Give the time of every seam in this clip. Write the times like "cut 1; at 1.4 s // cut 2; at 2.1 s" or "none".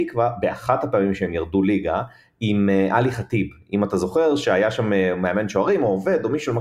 none